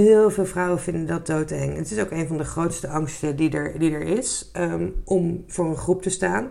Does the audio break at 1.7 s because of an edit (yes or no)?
no